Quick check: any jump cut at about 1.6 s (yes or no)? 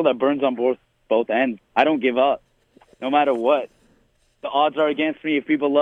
yes